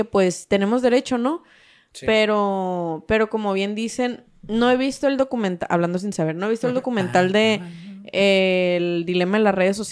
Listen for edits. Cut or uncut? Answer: uncut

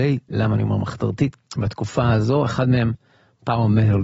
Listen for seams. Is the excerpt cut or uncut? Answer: cut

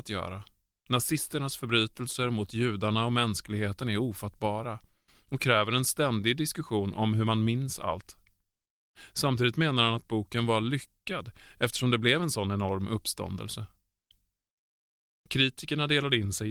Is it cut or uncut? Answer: uncut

